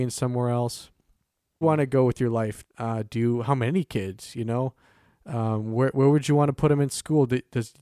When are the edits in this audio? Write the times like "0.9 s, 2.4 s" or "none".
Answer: 1.6 s, 2.6 s